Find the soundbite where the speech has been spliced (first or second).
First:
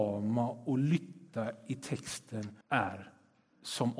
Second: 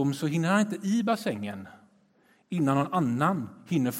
first